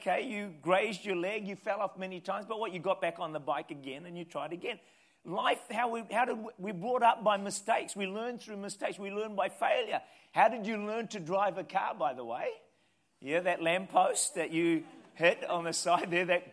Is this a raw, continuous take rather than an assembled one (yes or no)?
yes